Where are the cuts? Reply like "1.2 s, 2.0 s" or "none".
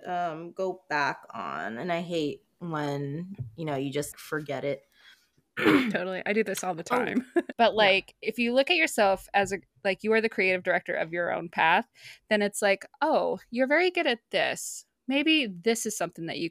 4.1 s, 7.5 s